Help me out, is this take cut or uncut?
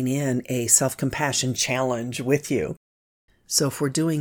cut